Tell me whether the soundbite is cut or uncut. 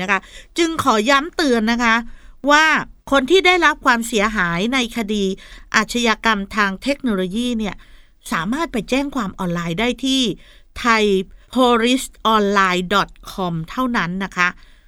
cut